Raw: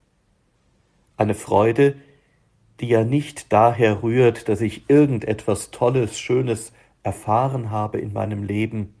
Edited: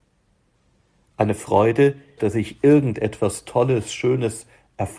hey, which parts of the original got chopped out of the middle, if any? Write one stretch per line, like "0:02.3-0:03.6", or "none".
0:02.2-0:04.4